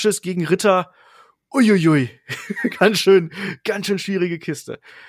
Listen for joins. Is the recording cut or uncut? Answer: uncut